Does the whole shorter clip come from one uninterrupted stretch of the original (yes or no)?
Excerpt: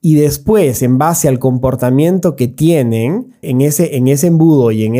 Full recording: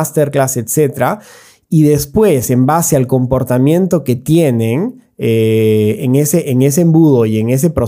no